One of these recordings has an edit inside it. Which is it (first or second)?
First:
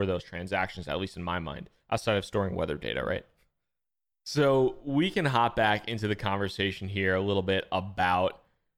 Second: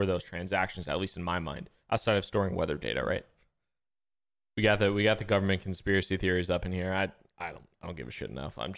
first